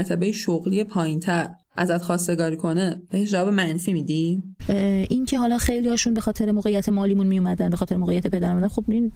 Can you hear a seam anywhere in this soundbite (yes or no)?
yes